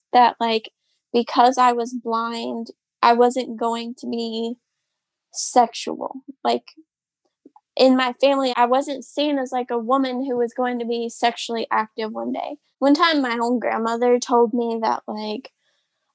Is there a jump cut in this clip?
yes; 1 cut; at 8.5 s

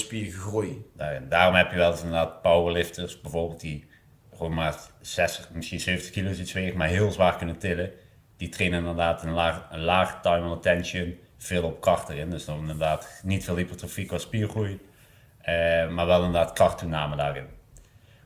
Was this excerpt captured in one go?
yes; 0 cuts

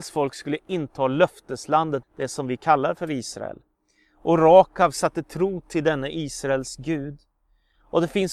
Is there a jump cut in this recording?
yes; 1 cut; at 2.0 s

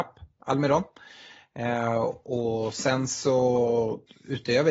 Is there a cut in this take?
no; 0 cuts

